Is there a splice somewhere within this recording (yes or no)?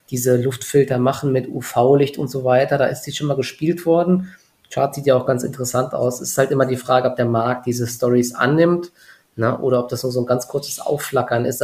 no